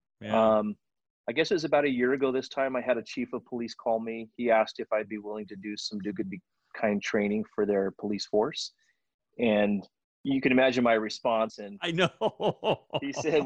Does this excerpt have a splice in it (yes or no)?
yes